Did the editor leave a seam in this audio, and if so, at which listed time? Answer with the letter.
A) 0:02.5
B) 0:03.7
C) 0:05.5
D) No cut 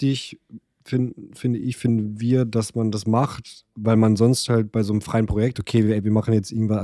C